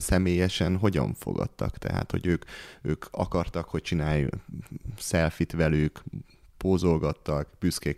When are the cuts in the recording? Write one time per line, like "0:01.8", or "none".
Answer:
none